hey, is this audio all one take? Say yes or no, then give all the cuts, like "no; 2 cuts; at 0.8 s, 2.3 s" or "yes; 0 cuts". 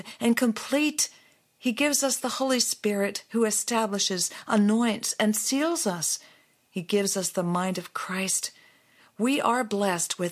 yes; 0 cuts